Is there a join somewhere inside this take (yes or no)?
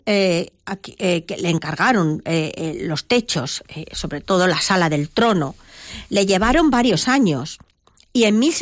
no